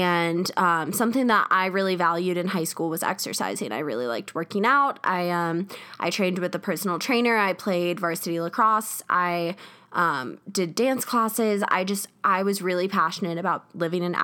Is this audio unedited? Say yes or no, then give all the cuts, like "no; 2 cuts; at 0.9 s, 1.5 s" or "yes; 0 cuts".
yes; 0 cuts